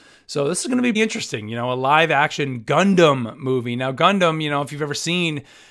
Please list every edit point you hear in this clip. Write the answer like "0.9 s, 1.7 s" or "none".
0.9 s